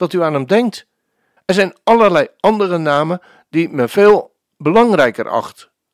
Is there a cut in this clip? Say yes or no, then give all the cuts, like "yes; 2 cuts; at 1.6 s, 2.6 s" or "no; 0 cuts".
yes; 2 cuts; at 1.4 s, 4.4 s